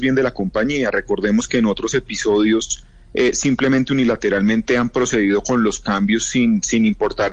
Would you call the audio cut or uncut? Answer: uncut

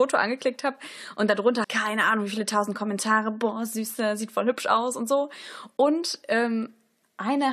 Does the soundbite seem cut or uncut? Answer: cut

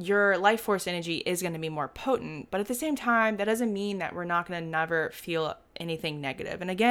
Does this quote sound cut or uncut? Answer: uncut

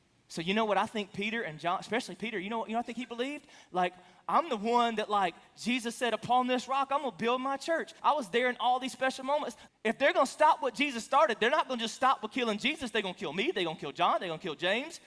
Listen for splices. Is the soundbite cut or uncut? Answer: cut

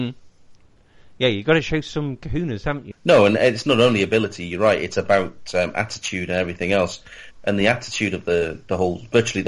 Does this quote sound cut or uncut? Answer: cut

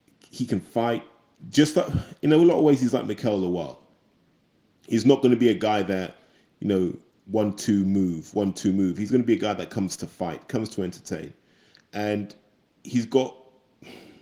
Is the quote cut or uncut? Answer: uncut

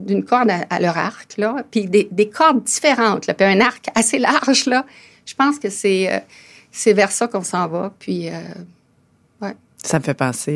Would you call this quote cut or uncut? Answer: uncut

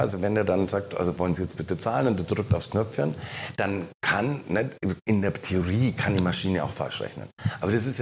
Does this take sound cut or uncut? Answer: uncut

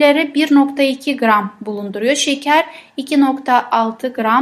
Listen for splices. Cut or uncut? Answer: uncut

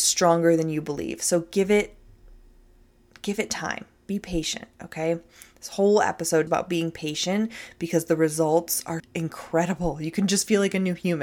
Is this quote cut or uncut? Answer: cut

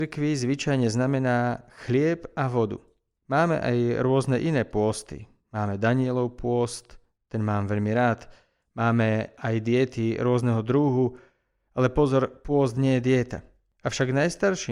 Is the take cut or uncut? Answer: uncut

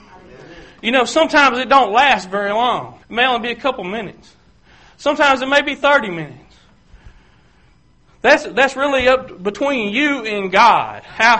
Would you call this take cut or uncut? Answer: cut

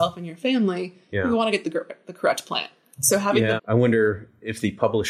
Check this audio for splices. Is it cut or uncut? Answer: cut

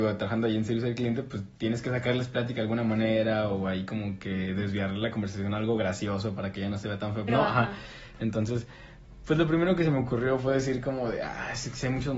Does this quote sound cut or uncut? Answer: cut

